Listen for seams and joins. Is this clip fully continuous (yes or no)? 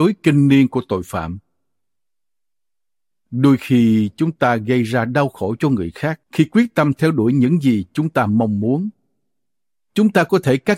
no